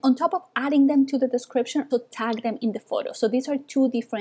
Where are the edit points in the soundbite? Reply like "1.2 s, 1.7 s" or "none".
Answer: 1.9 s